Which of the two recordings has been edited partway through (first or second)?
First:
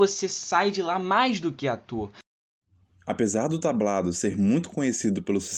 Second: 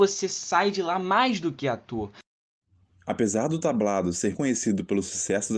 second